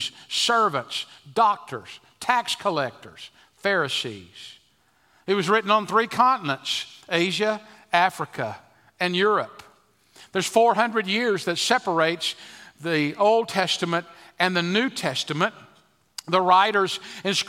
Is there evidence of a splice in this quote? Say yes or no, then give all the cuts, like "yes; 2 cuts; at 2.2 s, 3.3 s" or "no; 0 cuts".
no; 0 cuts